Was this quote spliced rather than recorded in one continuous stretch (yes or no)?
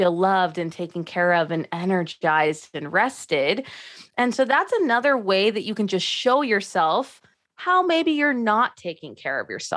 no